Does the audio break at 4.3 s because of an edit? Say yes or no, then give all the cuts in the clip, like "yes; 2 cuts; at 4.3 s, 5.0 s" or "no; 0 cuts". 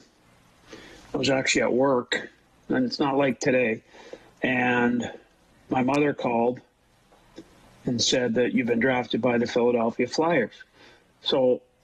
no; 0 cuts